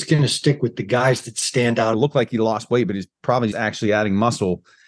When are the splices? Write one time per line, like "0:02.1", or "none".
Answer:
0:01.9
0:03.5